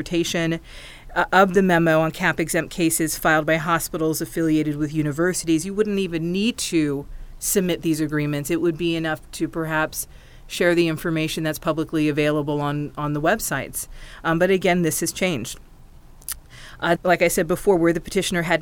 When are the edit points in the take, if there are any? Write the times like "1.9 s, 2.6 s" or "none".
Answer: 17.0 s